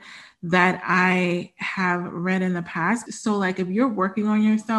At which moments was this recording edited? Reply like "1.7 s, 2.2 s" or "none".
3.1 s